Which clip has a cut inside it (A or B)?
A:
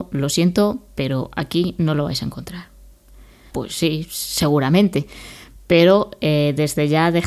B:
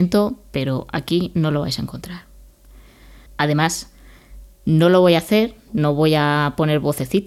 A